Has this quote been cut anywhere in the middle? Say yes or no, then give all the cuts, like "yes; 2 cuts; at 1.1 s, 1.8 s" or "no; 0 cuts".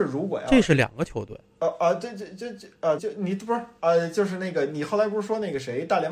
yes; 2 cuts; at 1.5 s, 3.0 s